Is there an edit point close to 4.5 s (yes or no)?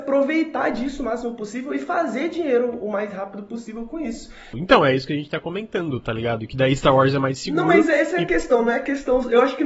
yes